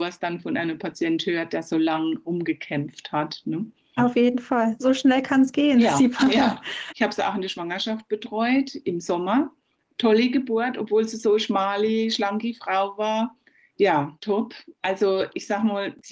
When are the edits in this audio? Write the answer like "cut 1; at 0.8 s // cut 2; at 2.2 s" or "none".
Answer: cut 1; at 6.9 s